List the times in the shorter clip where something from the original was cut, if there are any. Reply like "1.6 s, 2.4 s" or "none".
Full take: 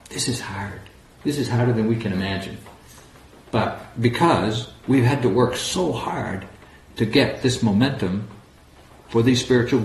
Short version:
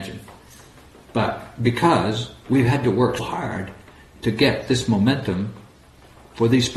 3.2 s